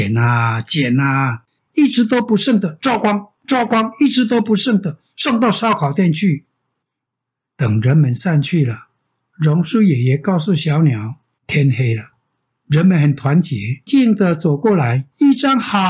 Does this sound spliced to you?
yes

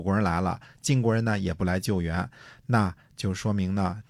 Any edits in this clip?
no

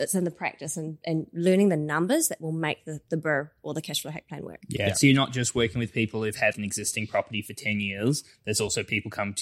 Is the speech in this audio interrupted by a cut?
yes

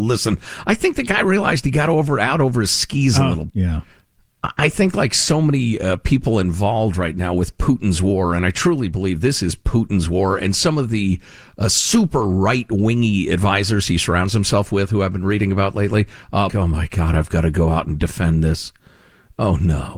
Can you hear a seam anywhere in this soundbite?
yes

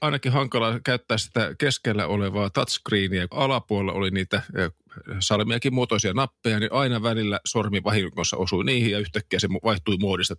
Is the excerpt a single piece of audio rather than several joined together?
no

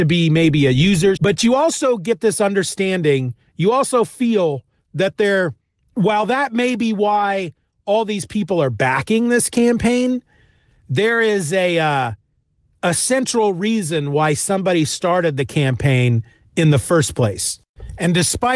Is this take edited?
yes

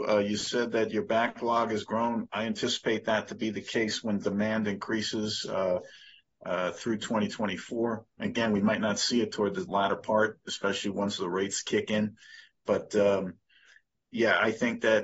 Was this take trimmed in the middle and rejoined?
no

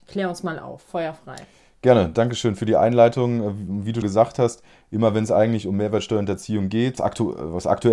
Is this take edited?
yes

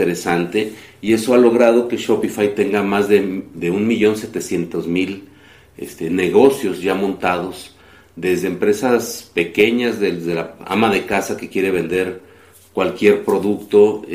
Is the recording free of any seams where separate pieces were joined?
yes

